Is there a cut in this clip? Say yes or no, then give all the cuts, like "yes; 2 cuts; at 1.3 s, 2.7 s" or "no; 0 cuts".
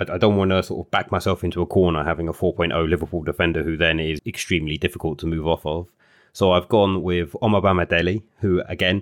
yes; 1 cut; at 4.2 s